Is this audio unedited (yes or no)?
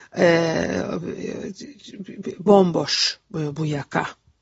yes